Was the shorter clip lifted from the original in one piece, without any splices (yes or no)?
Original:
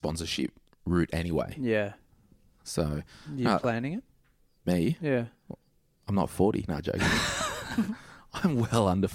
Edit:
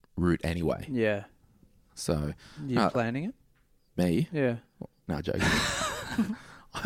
no